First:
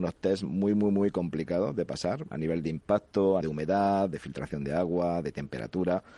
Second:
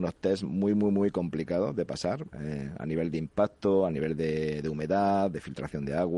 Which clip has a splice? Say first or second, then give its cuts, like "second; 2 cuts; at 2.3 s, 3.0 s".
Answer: first; 2 cuts; at 2.3 s, 3.4 s